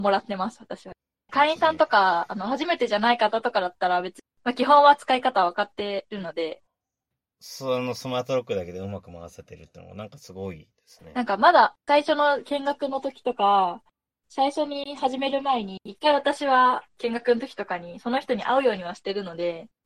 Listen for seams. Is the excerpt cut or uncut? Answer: cut